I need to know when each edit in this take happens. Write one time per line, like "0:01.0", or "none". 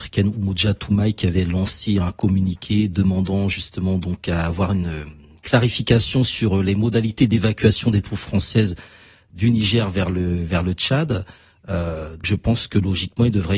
0:12.2